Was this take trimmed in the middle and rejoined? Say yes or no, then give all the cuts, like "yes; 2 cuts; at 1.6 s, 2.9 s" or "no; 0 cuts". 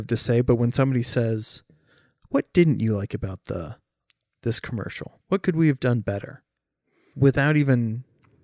yes; 2 cuts; at 5.2 s, 7.1 s